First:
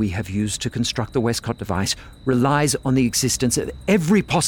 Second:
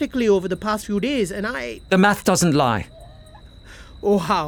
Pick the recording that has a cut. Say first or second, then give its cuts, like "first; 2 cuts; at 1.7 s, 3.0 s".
second; 1 cut; at 3.4 s